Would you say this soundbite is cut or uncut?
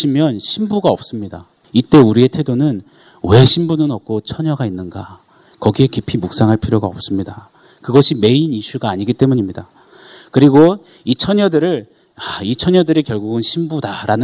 cut